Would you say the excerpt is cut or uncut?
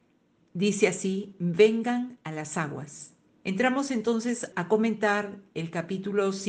cut